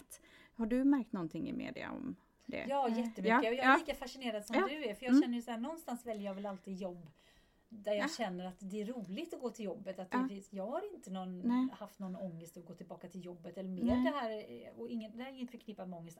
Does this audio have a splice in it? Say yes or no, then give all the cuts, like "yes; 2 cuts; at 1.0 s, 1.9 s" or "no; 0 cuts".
no; 0 cuts